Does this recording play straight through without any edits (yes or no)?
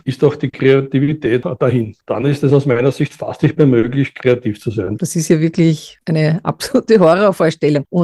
no